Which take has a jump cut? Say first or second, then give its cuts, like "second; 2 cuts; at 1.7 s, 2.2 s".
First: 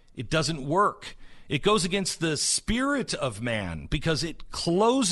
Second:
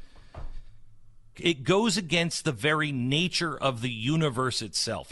second; 1 cut; at 1.3 s